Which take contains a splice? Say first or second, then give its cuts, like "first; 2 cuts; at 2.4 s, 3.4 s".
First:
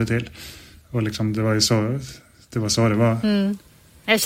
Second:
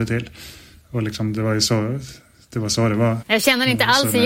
second; 1 cut; at 3.2 s